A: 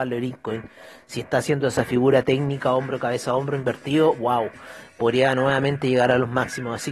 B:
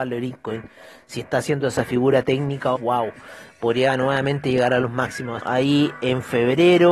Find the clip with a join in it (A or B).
B